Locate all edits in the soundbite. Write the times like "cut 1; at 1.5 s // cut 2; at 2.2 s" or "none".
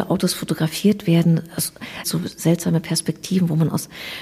cut 1; at 2.0 s